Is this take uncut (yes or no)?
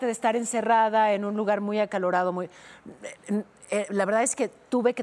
yes